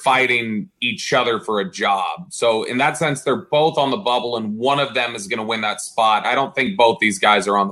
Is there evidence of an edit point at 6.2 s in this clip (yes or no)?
yes